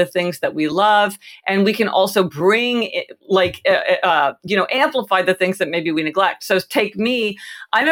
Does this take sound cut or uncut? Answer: uncut